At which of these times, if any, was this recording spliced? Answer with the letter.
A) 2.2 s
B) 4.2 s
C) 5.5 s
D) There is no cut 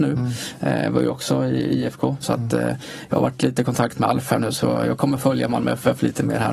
A